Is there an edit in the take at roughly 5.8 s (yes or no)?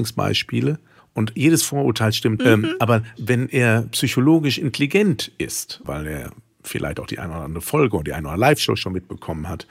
yes